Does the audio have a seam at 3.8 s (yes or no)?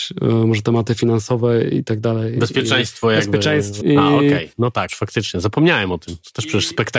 yes